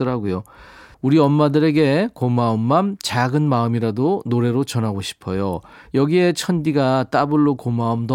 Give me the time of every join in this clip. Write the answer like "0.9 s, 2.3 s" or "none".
0.9 s